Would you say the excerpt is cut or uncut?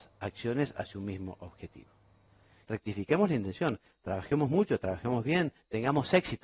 cut